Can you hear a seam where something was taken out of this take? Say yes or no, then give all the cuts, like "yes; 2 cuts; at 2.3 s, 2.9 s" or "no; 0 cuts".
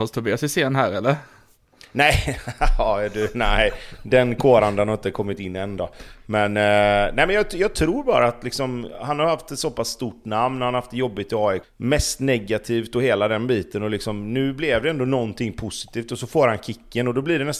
yes; 1 cut; at 11.6 s